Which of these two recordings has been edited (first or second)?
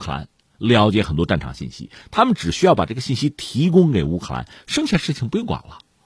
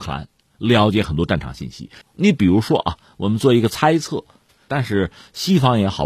second